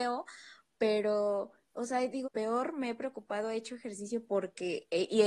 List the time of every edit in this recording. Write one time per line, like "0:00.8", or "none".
0:02.2